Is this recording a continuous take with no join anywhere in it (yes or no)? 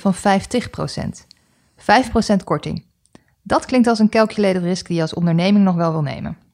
yes